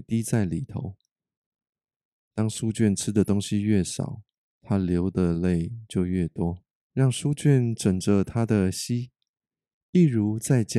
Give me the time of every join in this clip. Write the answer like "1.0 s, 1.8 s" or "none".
6.8 s